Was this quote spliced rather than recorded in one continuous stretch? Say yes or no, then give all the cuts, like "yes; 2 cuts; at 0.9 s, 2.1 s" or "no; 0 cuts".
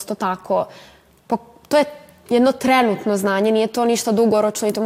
no; 0 cuts